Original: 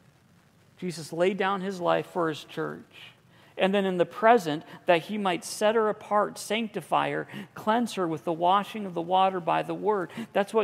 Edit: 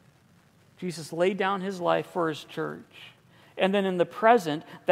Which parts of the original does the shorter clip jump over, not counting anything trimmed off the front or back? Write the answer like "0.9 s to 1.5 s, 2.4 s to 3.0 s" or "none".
none